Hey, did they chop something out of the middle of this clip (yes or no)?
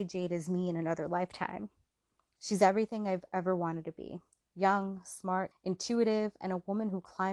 yes